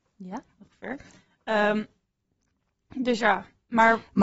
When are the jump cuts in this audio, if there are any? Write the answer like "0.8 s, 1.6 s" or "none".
none